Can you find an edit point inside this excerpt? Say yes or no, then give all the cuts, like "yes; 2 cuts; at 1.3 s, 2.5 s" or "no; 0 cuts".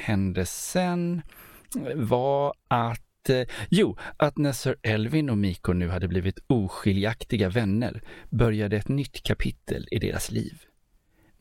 yes; 1 cut; at 4.2 s